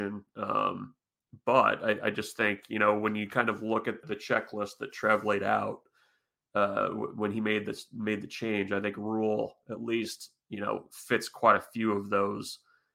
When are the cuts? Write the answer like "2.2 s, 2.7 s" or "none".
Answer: 4.0 s